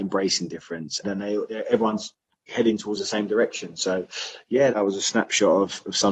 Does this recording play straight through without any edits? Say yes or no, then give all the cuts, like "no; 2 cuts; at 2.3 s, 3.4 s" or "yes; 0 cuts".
no; 2 cuts; at 1.0 s, 4.7 s